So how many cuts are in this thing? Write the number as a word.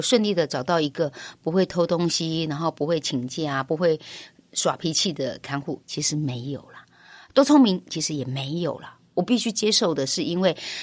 one